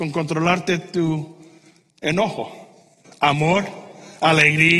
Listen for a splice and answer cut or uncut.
cut